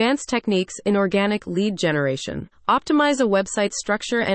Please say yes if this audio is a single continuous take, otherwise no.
no